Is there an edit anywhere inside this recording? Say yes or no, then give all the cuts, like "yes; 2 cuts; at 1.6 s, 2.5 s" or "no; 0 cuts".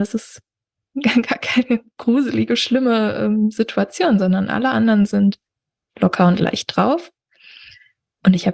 no; 0 cuts